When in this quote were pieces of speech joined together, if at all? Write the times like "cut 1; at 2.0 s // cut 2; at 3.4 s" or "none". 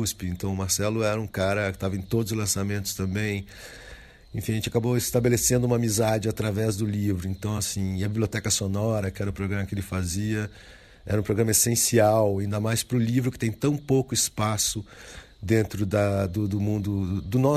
none